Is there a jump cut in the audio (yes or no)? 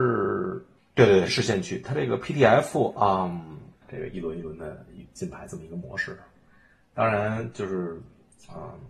yes